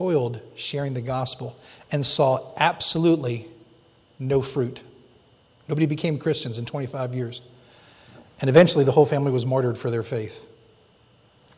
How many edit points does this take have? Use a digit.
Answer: 0